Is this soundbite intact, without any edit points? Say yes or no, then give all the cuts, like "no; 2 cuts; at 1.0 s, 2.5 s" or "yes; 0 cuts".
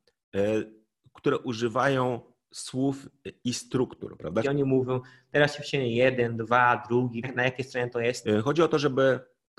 no; 3 cuts; at 4.4 s, 7.2 s, 8.2 s